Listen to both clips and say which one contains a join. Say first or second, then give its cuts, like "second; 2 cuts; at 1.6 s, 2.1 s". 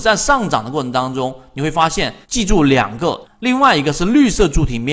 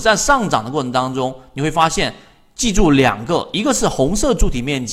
first; 2 cuts; at 2.2 s, 3.2 s